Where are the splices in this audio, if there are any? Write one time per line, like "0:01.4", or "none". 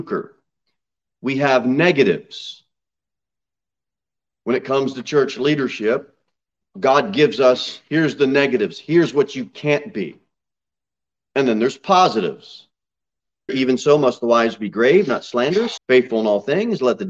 0:13.5
0:15.8